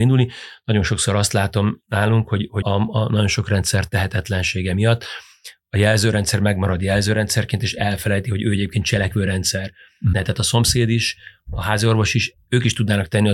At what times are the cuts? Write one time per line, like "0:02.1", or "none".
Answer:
0:02.6
0:10.1